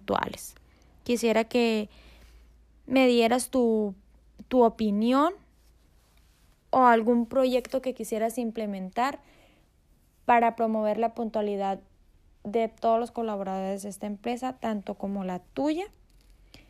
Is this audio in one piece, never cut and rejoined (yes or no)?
yes